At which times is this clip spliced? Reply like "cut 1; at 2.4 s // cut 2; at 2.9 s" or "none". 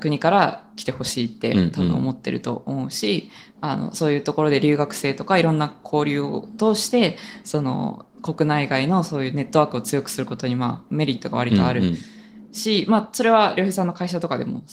cut 1; at 5.8 s